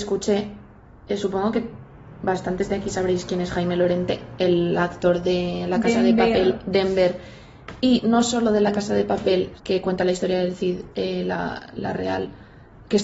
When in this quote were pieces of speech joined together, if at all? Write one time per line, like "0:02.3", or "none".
0:09.6
0:10.9

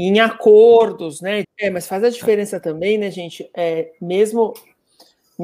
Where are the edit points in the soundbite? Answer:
0:01.4

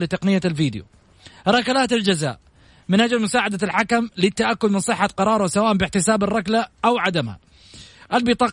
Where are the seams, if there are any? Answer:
none

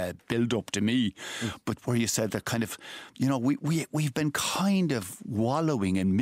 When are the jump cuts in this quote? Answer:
none

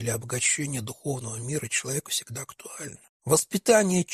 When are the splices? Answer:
0:03.2

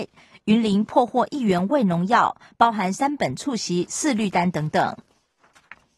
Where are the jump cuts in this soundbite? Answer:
none

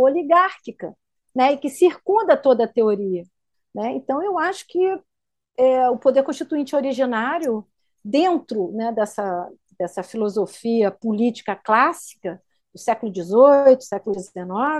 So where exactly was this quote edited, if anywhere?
0:03.5

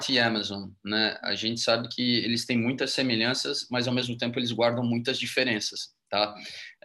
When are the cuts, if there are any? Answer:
none

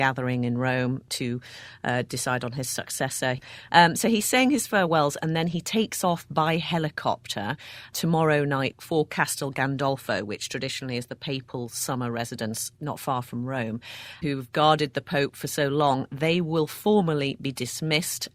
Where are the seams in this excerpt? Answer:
0:14.2

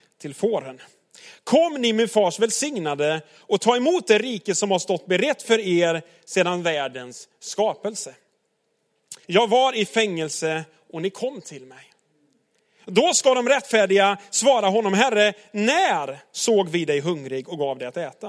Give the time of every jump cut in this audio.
0:09.2

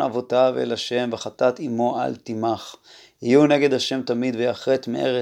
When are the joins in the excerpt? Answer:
none

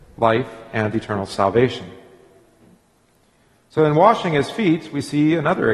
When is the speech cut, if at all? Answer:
none

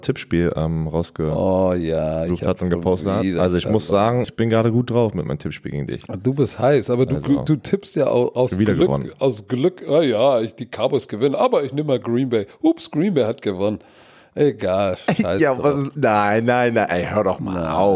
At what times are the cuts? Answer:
0:04.2

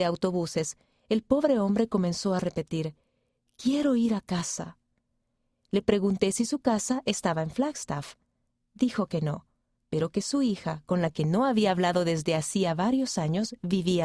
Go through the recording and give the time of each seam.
none

